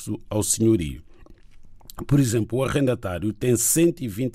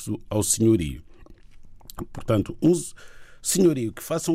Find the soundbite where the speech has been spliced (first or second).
second